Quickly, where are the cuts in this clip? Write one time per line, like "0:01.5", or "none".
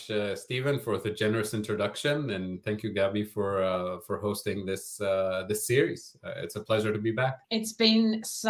0:07.4